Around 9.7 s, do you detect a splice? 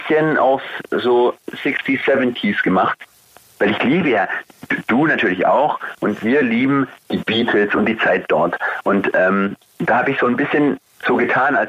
no; 0 cuts

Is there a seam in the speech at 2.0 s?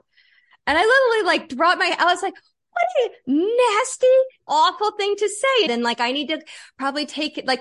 no; 2 cuts; at 4.5 s, 5.7 s

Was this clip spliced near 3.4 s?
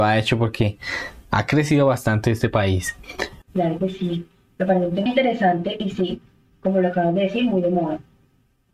yes; 2 cuts; at 3.4 s, 5.1 s

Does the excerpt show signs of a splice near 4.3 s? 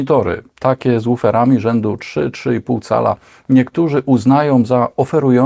no; 0 cuts

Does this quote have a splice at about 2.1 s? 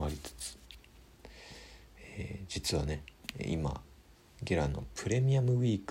no; 0 cuts

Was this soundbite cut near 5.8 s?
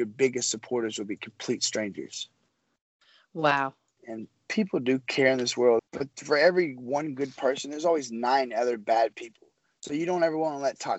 yes; 2 cuts; at 4.0 s, 5.8 s

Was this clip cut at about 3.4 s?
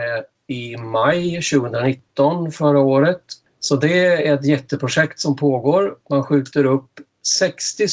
yes; 1 cut; at 3.4 s

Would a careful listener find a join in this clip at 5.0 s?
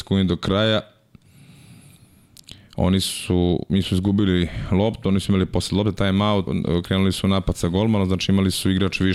no; 1 cut; at 6.5 s

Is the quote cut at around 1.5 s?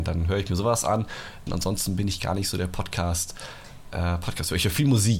yes; 1 cut; at 1.5 s

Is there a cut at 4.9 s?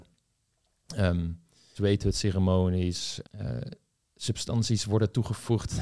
no; 2 cuts; at 1.8 s, 3.2 s

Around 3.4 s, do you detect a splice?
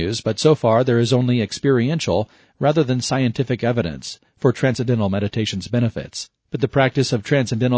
no; 1 cut; at 6.5 s

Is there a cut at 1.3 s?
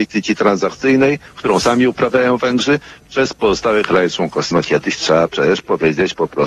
no; 1 cut; at 4.5 s

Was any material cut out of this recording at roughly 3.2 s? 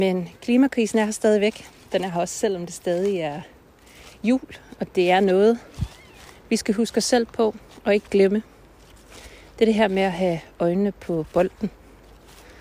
no; 0 cuts

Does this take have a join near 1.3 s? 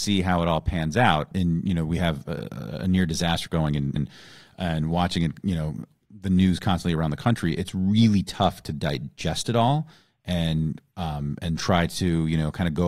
no; 1 cut; at 4.0 s

